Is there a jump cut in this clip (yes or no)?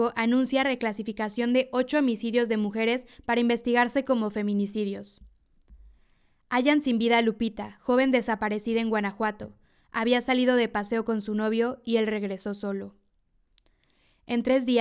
no